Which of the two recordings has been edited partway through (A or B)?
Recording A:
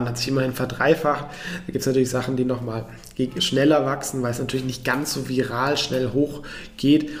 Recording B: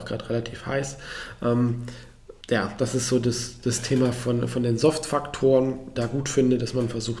B